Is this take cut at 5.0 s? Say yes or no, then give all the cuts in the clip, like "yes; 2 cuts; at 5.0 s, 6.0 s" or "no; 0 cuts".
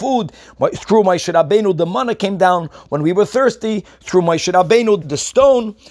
yes; 1 cut; at 5.0 s